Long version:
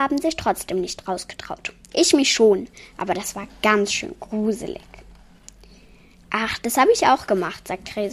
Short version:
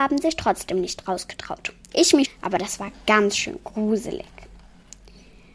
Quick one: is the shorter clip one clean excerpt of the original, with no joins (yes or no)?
no